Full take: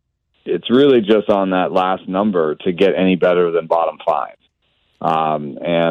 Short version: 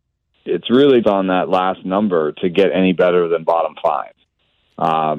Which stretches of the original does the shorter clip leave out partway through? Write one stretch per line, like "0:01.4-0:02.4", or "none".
0:01.0-0:01.3